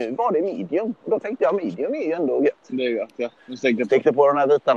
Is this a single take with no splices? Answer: no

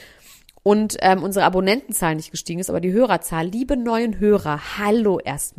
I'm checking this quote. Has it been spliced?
no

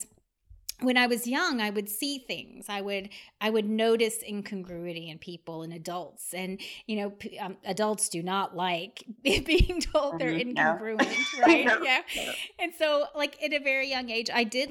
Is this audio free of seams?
yes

